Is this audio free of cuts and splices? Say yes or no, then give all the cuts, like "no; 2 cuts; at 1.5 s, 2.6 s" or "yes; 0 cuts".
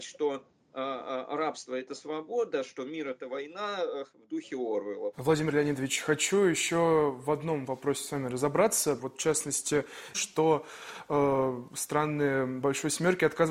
no; 3 cuts; at 5.1 s, 9.0 s, 10.1 s